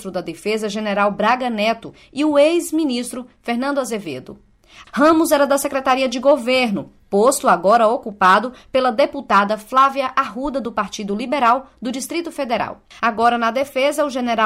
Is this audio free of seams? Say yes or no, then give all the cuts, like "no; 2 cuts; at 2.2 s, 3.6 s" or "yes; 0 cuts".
no; 2 cuts; at 4.8 s, 13.0 s